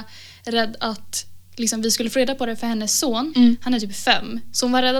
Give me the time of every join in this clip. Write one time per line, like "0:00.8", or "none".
0:03.3